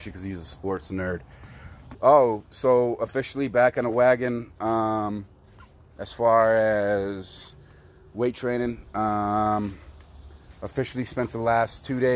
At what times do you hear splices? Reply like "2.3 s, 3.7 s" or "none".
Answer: 1.9 s